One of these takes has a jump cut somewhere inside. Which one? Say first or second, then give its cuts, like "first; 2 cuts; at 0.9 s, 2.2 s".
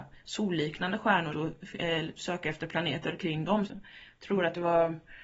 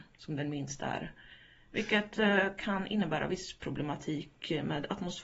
first; 2 cuts; at 1.3 s, 3.7 s